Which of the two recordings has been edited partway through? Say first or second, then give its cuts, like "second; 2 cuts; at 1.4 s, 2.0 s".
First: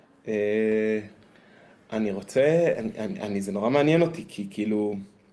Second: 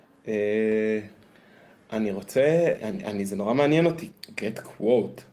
second; 2 cuts; at 2.8 s, 4.1 s